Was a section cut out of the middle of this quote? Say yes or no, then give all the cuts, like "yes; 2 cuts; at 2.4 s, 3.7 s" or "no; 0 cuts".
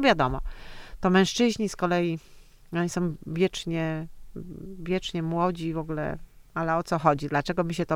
no; 0 cuts